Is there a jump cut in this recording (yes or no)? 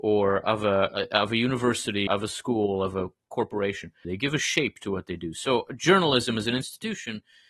yes